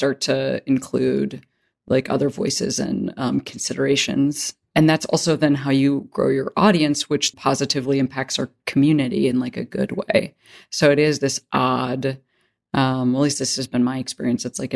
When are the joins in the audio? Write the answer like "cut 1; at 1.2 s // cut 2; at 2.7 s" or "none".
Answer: cut 1; at 7.3 s

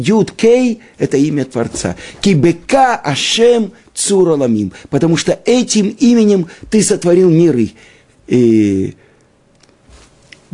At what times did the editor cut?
cut 1; at 8.1 s

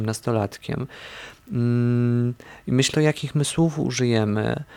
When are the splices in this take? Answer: cut 1; at 2.9 s

